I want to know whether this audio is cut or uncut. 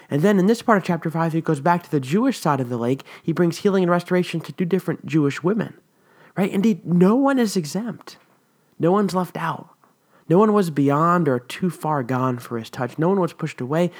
uncut